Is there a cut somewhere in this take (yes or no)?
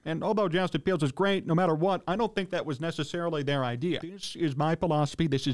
yes